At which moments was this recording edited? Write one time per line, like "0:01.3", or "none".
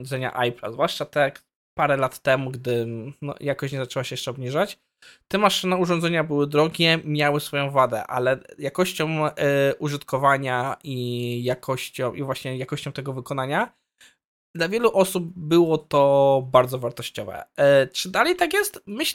none